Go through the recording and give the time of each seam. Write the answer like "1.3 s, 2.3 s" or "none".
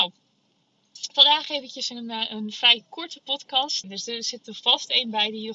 3.8 s

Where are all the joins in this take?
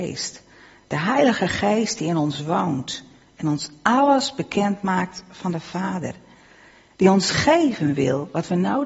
none

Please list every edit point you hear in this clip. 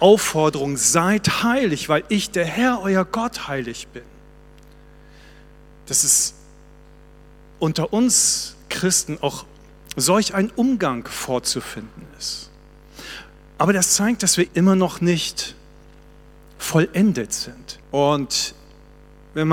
14.5 s, 17.8 s

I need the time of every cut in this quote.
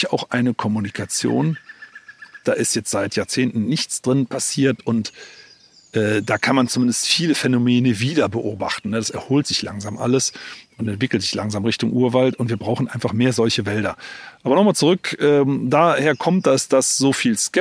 2.4 s

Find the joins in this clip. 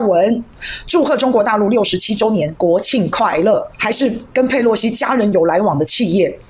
3.8 s

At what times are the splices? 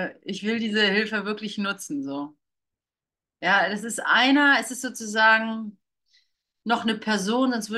none

